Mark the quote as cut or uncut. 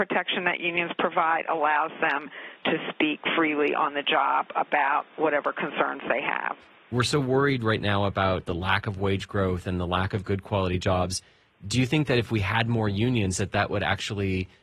uncut